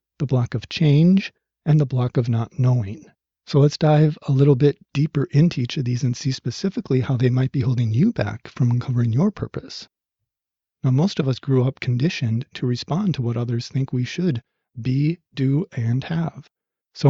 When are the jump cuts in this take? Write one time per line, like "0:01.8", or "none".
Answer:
0:10.6